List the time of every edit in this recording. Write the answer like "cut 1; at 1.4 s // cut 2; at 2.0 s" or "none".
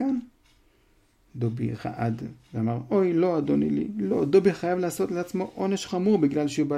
cut 1; at 5.9 s